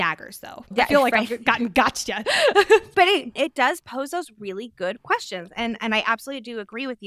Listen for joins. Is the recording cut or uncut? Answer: cut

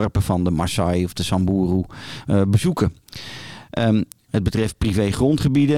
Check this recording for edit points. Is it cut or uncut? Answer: cut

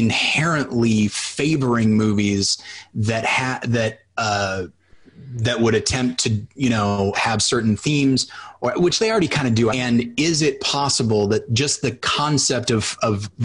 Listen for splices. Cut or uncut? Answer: cut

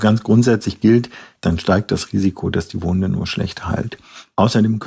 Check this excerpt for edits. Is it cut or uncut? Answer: cut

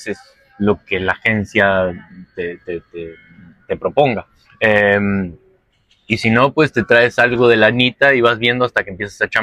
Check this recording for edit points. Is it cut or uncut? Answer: cut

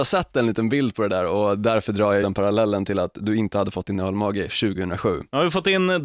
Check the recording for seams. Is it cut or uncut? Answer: cut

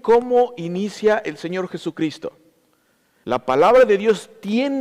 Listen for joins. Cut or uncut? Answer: cut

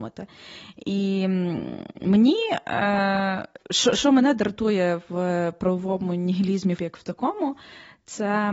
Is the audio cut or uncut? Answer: cut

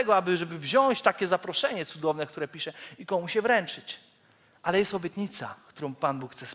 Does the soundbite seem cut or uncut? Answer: uncut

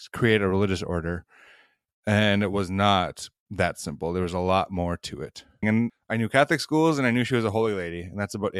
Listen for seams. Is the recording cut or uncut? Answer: cut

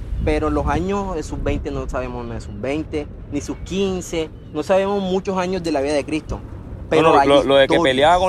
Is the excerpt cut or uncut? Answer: uncut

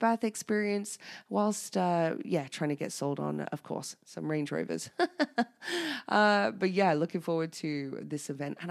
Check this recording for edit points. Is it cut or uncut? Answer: uncut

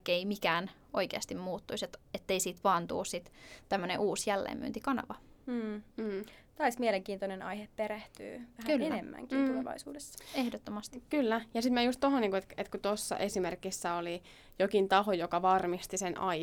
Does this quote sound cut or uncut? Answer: uncut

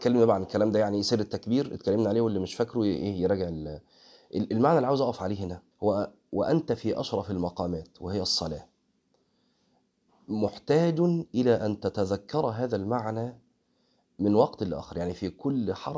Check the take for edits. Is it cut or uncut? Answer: cut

